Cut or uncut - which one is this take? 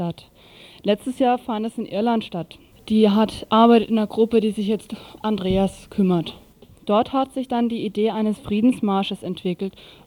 cut